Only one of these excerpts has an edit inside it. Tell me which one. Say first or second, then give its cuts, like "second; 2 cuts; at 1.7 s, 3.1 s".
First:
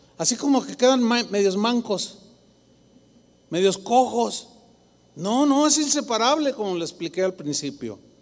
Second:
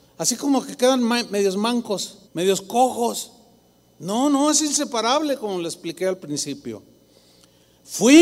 second; 1 cut; at 2.3 s